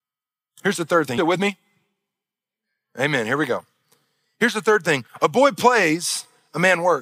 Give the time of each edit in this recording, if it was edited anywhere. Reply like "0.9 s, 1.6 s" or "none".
1.2 s